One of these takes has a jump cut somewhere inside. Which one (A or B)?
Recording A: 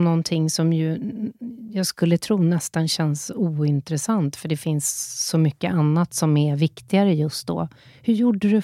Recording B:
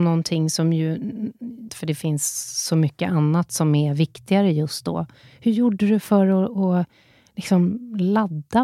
B